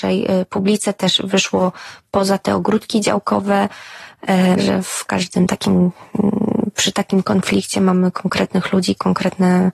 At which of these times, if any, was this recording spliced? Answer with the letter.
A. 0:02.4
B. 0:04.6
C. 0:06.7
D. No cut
B